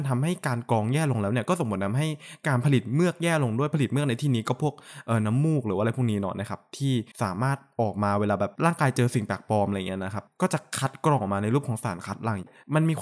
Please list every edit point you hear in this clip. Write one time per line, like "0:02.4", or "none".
0:07.1